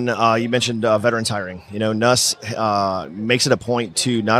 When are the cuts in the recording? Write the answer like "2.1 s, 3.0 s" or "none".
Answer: none